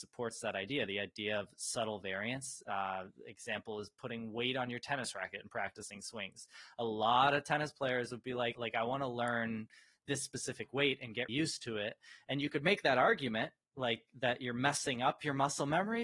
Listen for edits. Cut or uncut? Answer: cut